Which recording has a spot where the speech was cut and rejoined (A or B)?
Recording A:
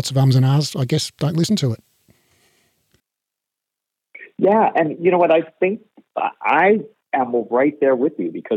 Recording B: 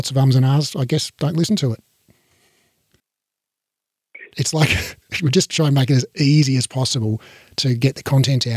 B